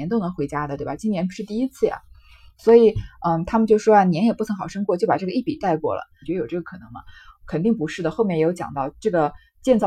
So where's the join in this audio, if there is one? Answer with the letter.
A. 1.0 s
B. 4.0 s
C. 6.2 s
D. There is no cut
C